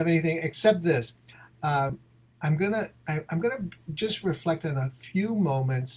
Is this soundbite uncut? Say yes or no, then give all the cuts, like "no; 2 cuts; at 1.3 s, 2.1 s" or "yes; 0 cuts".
yes; 0 cuts